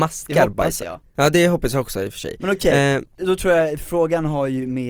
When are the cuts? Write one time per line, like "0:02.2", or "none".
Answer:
none